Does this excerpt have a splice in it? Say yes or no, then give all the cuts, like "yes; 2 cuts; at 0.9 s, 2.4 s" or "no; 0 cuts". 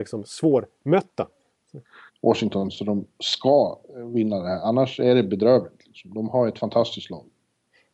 yes; 1 cut; at 2.1 s